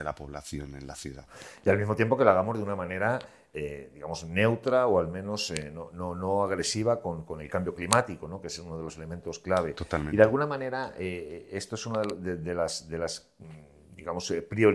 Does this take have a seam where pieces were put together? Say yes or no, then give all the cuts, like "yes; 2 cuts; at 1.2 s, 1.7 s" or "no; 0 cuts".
no; 0 cuts